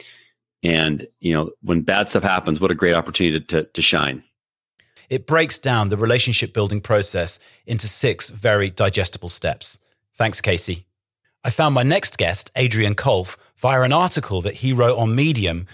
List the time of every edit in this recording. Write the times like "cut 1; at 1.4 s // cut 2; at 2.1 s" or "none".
cut 1; at 5.0 s

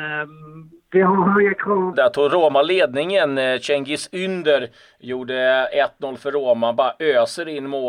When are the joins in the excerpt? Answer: cut 1; at 1.9 s

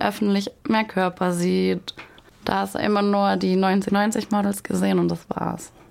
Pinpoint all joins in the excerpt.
cut 1; at 2.3 s // cut 2; at 3.9 s

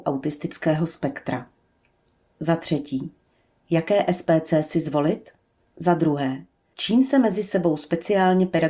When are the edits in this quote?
cut 1; at 5.6 s

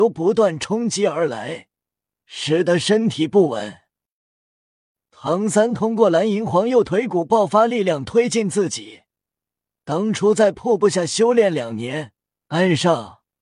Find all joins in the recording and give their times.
cut 1; at 12.4 s

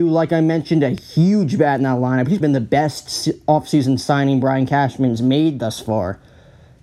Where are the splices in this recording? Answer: cut 1; at 2.4 s

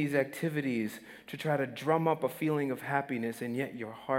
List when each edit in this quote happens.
none

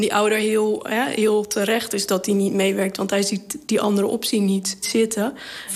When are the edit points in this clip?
none

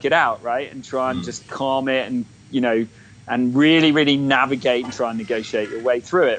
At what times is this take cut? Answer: none

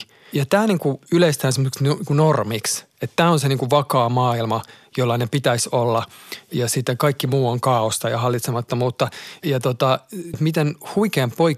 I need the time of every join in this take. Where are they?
cut 1; at 10.3 s

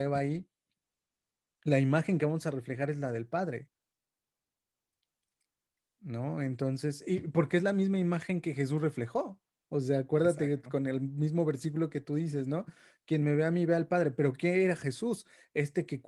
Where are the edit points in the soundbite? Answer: none

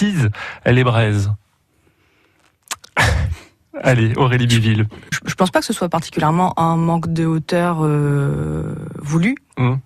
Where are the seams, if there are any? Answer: cut 1; at 5.1 s

